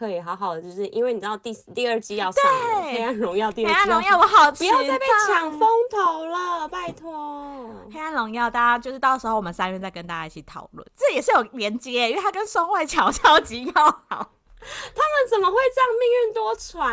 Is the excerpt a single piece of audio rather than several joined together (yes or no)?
no